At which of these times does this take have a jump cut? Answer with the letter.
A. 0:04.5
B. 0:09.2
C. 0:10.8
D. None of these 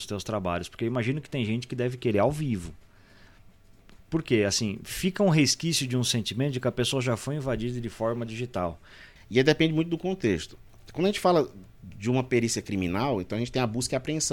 B